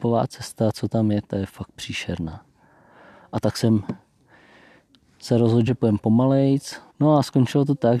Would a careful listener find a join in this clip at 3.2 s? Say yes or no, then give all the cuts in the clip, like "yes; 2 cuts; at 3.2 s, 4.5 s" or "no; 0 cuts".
no; 2 cuts; at 5.7 s, 6.9 s